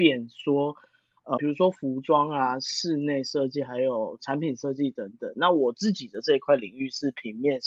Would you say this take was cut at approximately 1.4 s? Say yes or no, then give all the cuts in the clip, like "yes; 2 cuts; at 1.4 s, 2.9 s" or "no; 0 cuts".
yes; 1 cut; at 1.4 s